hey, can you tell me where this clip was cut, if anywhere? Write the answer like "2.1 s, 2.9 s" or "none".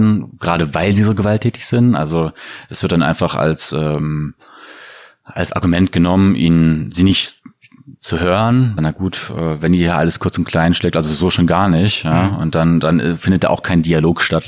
8.8 s